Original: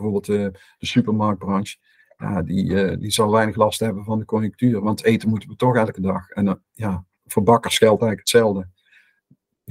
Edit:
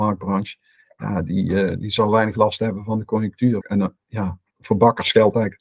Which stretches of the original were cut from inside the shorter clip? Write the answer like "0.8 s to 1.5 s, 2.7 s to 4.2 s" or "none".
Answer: 4.8 s to 6.3 s